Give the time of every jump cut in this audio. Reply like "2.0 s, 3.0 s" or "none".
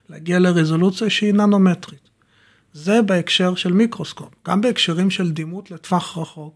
none

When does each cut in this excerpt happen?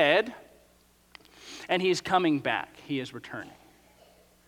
none

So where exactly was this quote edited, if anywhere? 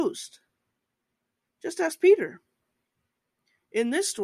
1.4 s

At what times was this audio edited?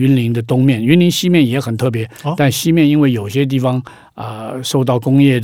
none

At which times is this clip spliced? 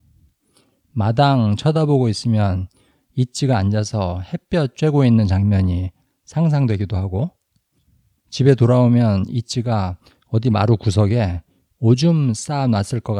none

